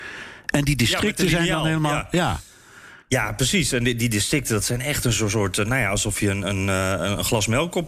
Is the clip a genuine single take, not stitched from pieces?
no; 1 cut; at 3.0 s

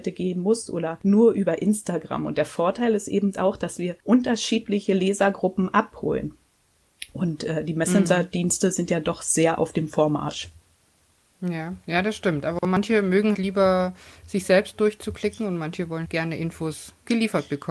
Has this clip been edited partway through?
yes; 2 cuts; at 13.3 s, 16.0 s

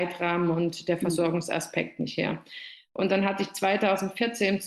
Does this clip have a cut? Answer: no; 0 cuts

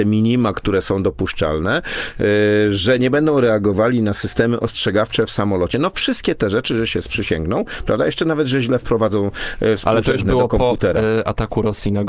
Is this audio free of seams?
yes; 0 cuts

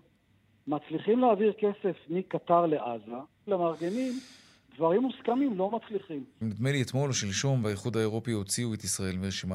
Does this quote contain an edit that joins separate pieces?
yes; 2 cuts; at 3.5 s, 6.4 s

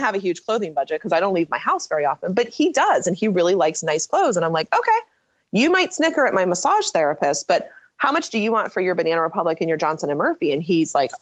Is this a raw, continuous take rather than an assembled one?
yes; 0 cuts

